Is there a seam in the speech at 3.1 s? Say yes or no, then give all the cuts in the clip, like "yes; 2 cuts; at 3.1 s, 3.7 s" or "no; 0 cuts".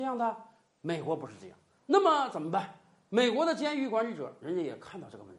no; 1 cut; at 1.8 s